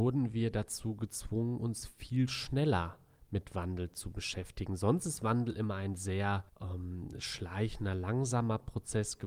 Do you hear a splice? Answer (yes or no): yes